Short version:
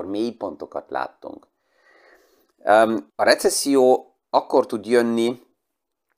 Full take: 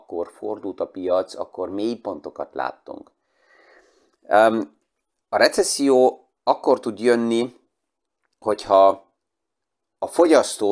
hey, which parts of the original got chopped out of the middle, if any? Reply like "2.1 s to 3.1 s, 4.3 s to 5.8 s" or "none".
4.7 s to 5.2 s

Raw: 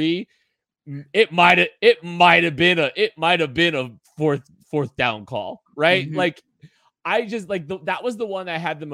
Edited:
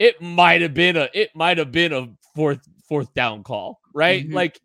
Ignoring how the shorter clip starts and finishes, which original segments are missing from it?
none

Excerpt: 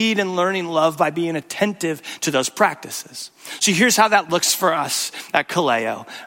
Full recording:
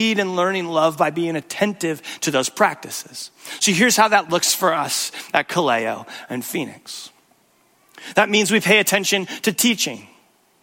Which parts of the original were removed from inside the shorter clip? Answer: none

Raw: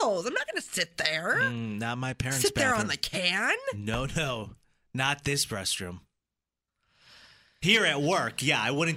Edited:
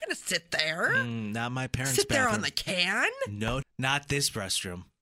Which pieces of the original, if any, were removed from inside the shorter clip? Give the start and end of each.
4.1 s to 4.8 s

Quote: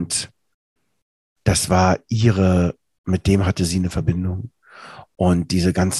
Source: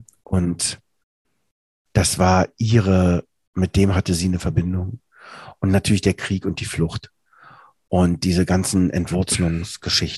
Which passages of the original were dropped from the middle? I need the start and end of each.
5.5 s to 7.8 s

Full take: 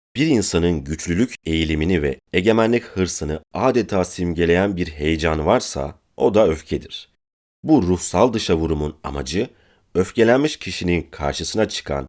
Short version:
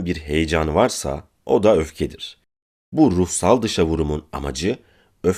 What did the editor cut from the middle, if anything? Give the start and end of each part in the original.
none

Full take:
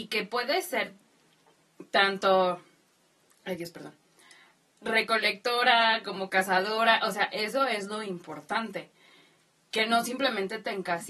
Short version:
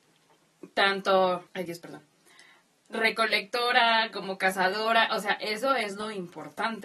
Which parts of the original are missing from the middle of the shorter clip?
2.6 s to 3.4 s

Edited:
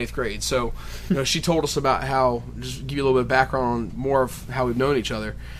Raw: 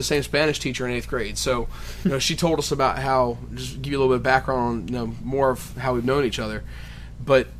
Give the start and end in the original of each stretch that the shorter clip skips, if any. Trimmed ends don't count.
4.8 s to 5.2 s

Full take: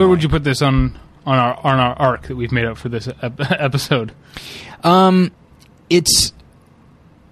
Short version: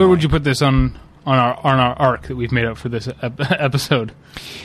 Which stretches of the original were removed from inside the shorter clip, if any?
none

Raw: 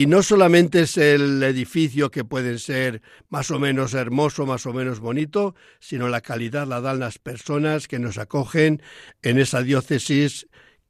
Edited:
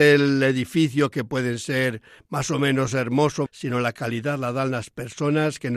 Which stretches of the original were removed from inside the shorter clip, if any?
4.5 s to 5.7 s

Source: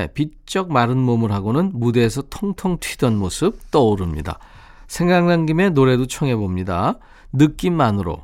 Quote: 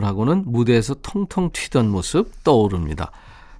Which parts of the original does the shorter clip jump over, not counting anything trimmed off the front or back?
none

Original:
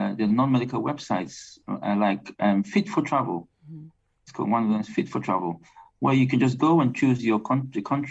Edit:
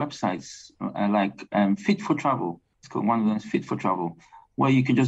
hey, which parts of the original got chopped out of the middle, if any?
3.6 s to 4.2 s

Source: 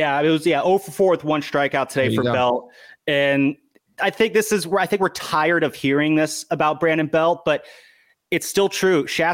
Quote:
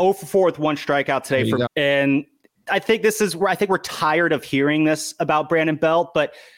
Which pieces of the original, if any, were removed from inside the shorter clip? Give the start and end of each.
2.3 s to 3.0 s

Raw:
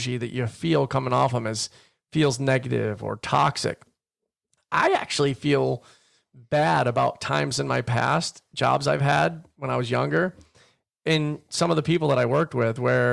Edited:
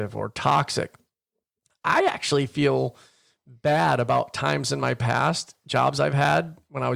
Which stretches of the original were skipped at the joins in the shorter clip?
none

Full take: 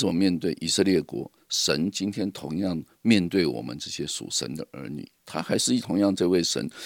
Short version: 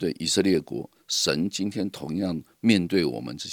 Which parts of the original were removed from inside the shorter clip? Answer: none

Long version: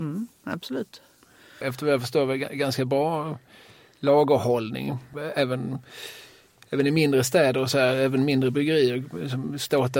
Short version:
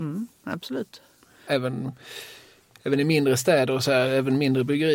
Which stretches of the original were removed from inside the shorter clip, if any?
1.5 s to 5.3 s

